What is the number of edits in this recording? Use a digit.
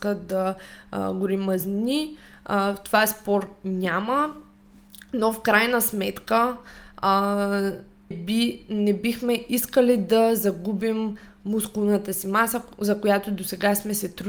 1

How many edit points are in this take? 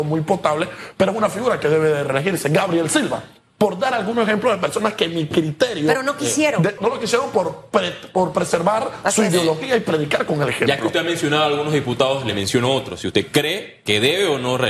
1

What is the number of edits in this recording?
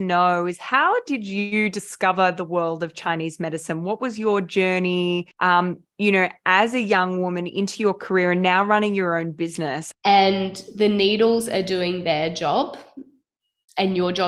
2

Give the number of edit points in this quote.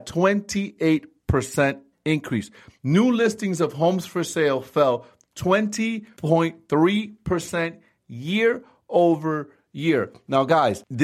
1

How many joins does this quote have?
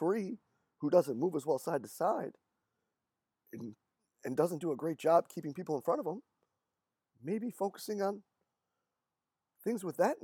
0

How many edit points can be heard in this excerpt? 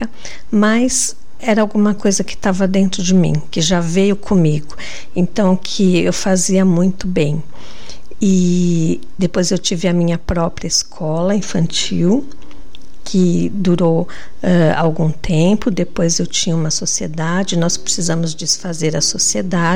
1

